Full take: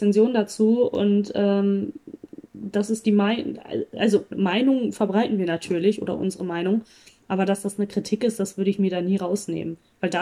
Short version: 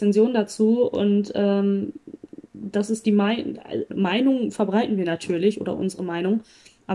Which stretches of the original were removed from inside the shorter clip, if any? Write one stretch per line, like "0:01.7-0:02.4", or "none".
0:03.9-0:04.3